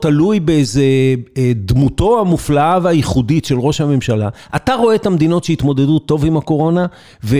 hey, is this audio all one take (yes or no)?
yes